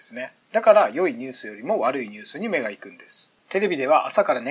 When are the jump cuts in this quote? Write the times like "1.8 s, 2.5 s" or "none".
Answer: 3.4 s